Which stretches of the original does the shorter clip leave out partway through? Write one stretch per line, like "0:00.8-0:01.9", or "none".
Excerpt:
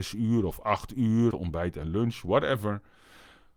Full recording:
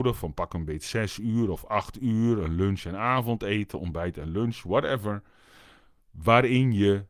0:02.4-0:03.7